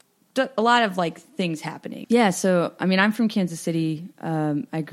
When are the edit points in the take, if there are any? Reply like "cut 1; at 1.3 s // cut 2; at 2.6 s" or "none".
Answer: cut 1; at 2.0 s